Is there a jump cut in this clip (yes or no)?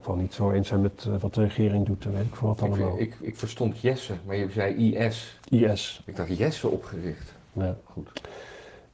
yes